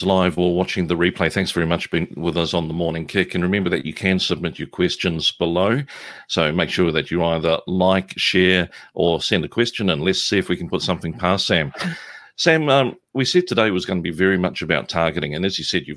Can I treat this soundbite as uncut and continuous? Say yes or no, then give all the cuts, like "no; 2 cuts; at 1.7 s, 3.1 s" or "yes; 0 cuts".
yes; 0 cuts